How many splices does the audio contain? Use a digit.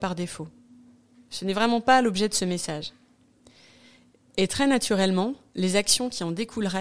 1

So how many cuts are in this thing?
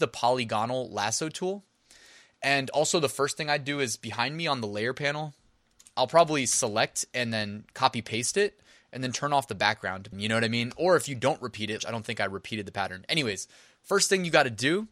2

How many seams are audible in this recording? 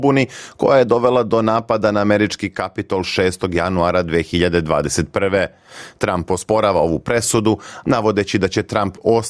1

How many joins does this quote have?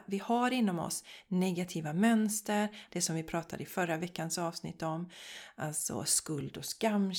1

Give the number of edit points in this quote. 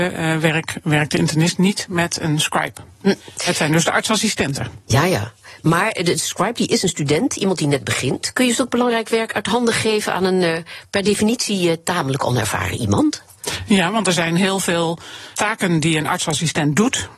1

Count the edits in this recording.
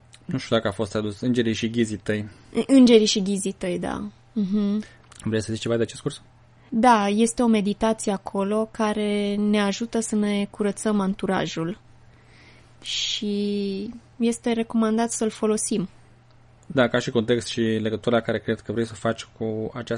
0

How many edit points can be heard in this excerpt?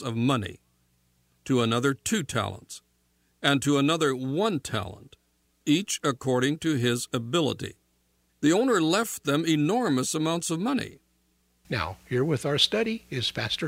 2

